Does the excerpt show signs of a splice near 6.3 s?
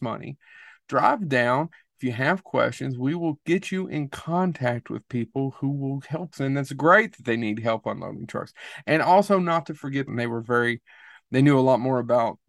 yes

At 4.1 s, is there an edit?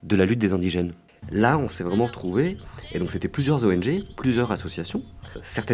no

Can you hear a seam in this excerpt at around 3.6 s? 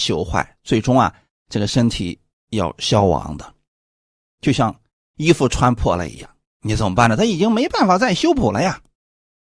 no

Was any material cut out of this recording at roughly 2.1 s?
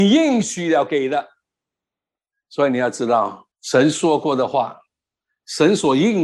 no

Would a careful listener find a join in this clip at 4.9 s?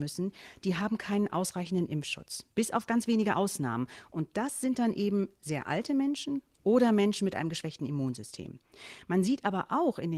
no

